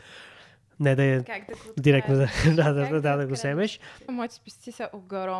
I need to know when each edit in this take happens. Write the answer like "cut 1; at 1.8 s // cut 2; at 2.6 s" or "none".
cut 1; at 4.1 s